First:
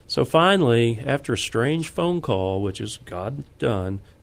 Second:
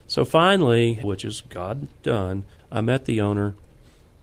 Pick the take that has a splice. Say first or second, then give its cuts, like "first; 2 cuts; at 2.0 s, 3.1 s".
second; 2 cuts; at 1.0 s, 2.6 s